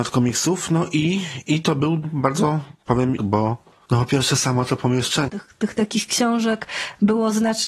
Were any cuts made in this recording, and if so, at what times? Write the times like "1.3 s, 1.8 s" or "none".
3.2 s, 5.3 s